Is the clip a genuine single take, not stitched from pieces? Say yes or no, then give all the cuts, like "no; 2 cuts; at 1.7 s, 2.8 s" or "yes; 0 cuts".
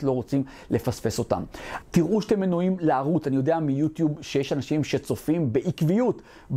no; 1 cut; at 1.8 s